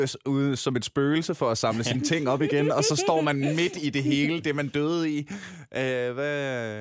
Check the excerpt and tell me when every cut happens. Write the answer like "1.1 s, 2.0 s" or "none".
none